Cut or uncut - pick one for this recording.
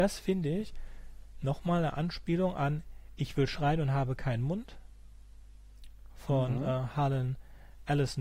uncut